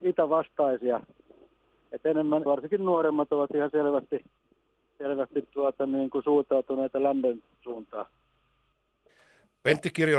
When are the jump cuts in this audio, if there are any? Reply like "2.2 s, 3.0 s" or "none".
2.5 s

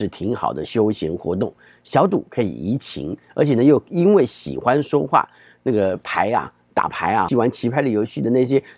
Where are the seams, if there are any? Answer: 7.3 s

